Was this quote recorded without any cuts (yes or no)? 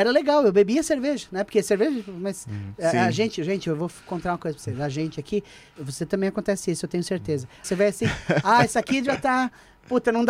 no